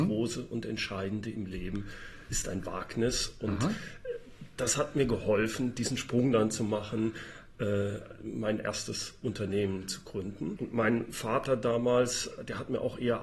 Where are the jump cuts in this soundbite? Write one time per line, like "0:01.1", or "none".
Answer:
0:10.6